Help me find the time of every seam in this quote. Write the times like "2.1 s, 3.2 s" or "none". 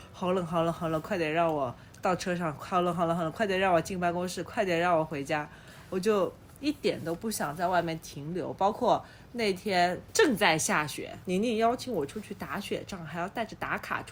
none

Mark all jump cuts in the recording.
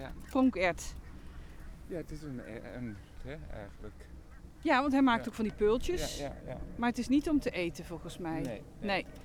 3.2 s

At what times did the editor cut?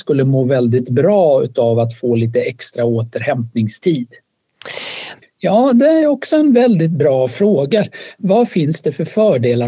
5.2 s

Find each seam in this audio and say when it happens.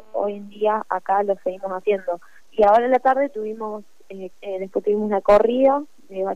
2.4 s, 4.3 s

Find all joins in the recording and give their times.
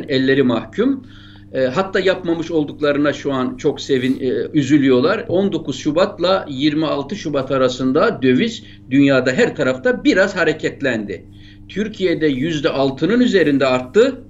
5.3 s

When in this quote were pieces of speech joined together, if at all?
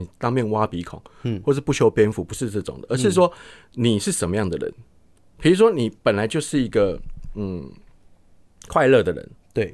none

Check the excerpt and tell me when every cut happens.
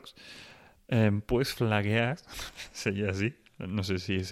none

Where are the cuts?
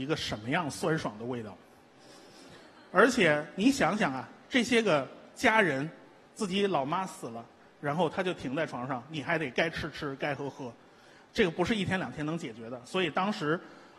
none

